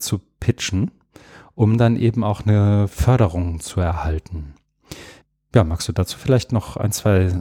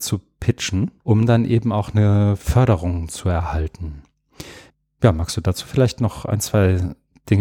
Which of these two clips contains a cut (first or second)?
second